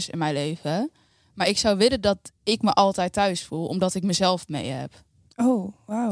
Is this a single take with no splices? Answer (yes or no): yes